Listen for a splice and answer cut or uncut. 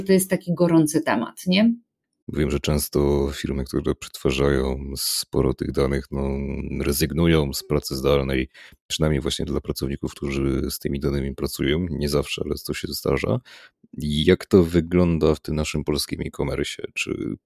cut